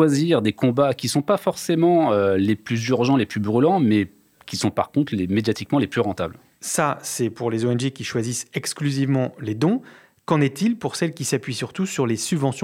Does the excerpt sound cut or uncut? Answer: uncut